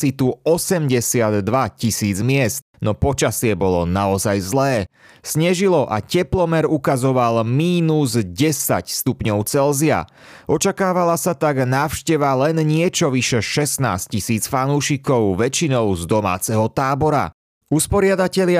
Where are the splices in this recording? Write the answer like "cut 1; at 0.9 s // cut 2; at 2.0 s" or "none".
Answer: none